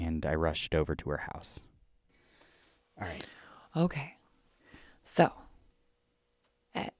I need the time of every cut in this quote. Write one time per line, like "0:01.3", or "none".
none

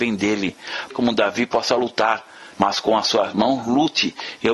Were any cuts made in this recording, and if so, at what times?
0:00.9
0:02.5

